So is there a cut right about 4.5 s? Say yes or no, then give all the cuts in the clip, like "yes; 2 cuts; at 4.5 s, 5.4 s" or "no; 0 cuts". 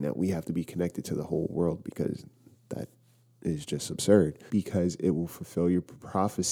yes; 1 cut; at 4.5 s